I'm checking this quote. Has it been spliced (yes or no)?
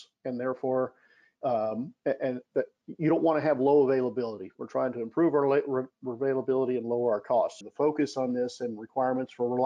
yes